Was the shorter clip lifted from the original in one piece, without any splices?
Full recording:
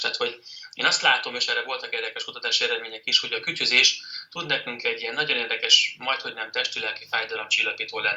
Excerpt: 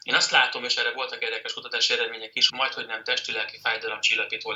no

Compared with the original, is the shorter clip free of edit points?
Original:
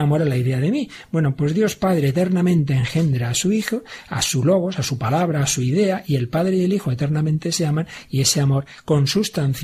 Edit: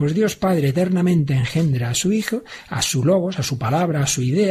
yes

